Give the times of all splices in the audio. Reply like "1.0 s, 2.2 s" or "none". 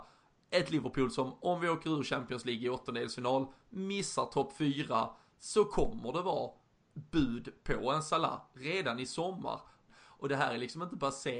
9.9 s